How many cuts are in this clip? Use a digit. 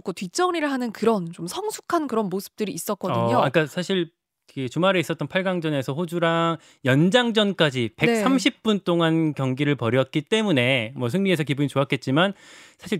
0